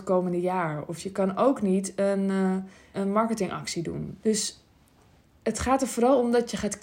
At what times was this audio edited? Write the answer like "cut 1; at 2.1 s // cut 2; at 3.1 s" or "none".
cut 1; at 2.9 s // cut 2; at 4.2 s